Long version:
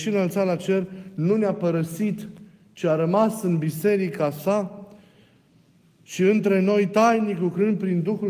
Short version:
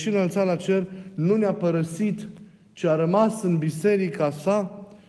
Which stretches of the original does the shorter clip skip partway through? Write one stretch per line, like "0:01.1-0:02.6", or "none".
none